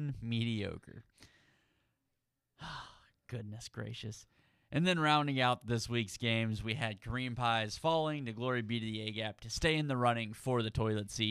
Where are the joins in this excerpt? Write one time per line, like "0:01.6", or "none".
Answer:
none